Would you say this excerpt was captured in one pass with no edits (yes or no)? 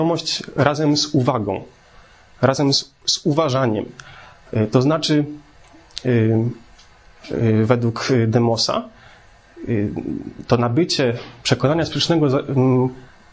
yes